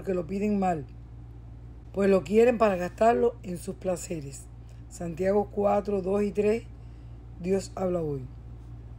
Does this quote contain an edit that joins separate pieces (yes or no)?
no